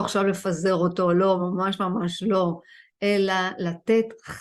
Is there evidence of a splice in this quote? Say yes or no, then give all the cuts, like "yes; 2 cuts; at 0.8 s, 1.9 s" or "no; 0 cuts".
no; 0 cuts